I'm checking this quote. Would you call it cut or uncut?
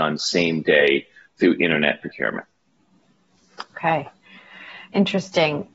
cut